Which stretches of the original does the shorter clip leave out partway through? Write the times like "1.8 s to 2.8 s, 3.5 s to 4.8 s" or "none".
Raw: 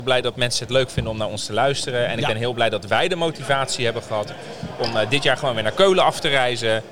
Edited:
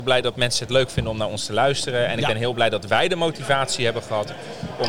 none